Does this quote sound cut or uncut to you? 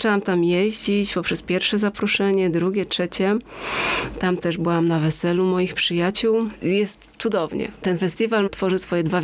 cut